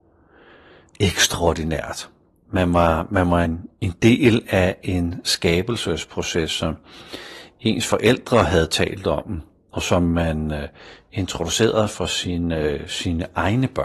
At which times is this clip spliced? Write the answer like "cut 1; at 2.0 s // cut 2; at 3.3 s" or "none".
none